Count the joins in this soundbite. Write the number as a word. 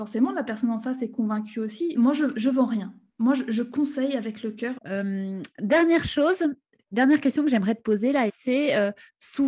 three